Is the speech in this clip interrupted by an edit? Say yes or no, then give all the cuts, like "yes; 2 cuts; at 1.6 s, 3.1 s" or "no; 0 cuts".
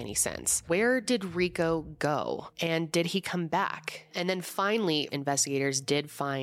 yes; 2 cuts; at 4.1 s, 5.1 s